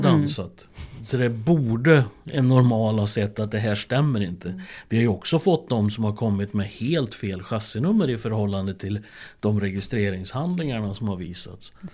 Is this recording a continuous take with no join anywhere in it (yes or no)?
yes